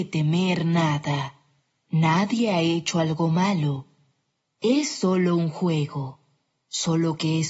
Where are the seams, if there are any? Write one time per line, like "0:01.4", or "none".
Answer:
none